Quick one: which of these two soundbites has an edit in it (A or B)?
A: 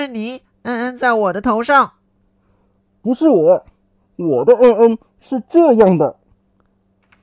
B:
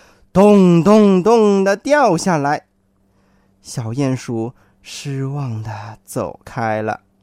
A